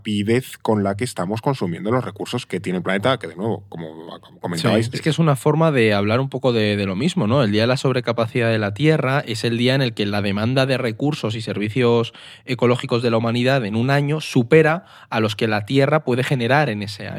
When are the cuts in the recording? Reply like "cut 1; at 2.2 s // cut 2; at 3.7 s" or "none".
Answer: cut 1; at 4.9 s